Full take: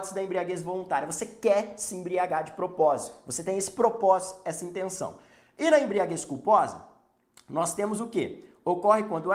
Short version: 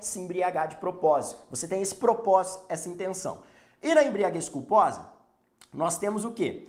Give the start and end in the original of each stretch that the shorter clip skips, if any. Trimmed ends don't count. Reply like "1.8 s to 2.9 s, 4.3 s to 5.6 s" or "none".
none